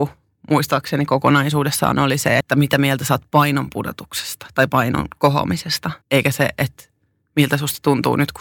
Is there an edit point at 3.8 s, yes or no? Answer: no